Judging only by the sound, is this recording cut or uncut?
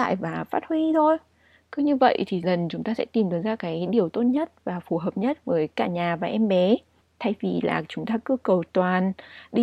cut